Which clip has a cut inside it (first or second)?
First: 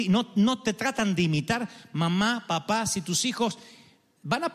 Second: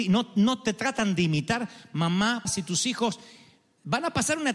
second